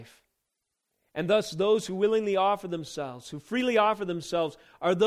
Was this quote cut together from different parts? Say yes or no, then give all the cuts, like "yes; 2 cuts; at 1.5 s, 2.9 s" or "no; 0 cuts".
no; 0 cuts